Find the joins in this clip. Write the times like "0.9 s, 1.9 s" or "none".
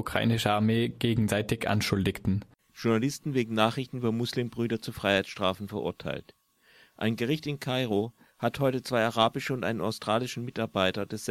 2.7 s